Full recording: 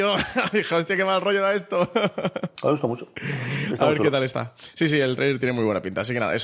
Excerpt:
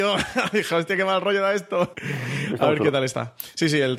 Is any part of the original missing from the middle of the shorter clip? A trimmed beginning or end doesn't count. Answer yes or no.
yes